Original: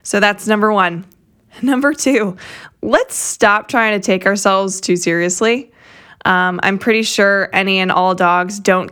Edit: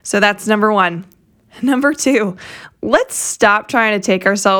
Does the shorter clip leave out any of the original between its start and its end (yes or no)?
no